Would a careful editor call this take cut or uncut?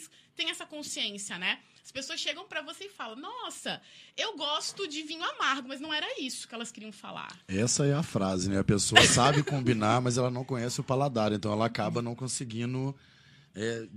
uncut